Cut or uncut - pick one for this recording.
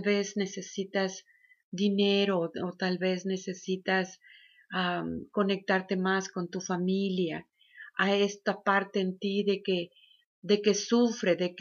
uncut